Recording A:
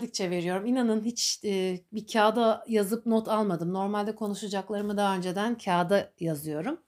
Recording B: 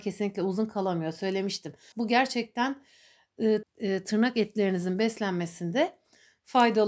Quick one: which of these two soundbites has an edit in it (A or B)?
B